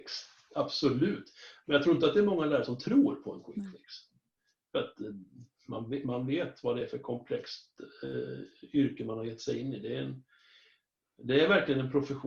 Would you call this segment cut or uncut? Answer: uncut